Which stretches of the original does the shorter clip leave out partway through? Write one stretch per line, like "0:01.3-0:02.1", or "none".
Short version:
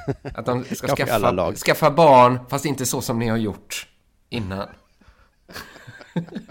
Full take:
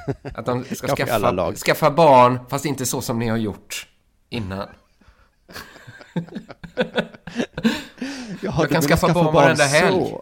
none

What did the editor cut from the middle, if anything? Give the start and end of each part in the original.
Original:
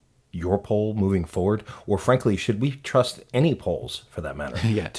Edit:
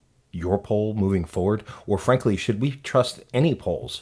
none

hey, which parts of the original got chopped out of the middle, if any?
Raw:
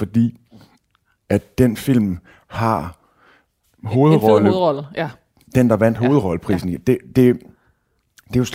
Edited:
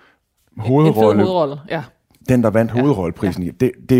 none

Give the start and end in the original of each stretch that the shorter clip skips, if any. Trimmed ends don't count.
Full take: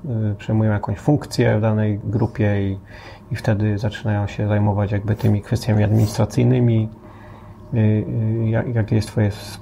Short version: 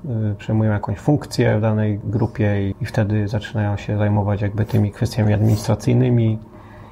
0:02.7-0:03.2

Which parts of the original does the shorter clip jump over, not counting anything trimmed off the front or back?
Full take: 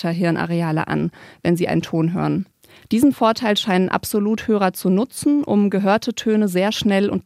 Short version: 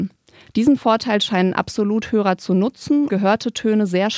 0:05.4-0:05.7

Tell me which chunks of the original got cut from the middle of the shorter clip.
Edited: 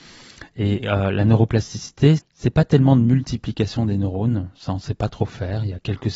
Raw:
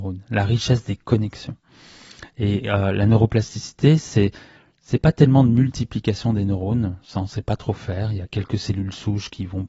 0:04.0-0:04.7

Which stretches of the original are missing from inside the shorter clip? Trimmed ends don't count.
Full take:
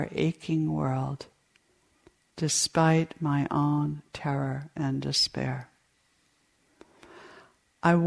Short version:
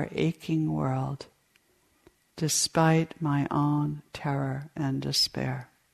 none

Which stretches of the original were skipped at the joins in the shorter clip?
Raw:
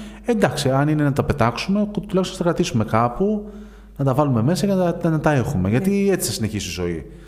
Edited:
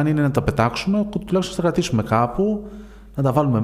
none

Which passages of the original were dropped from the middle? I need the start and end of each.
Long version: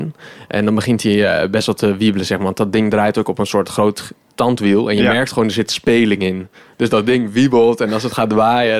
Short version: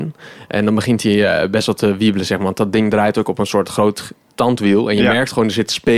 none

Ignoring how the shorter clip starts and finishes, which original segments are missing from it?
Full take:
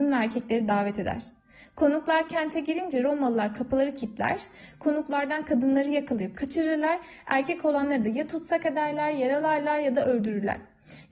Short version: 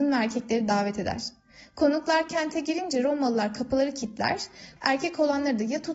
0:04.8-0:07.2

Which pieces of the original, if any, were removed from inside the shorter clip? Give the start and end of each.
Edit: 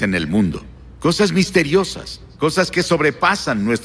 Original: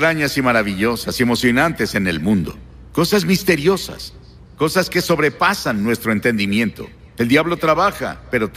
0:04.3-0:04.5

